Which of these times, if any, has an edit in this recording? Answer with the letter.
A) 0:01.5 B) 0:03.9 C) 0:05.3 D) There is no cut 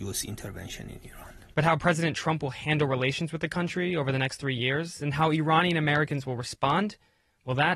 A